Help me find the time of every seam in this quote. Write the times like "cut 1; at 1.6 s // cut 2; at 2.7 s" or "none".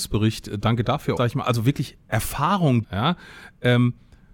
cut 1; at 1.2 s // cut 2; at 2.8 s